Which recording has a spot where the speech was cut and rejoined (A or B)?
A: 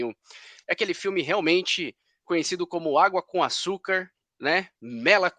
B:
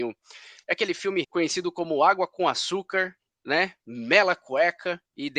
B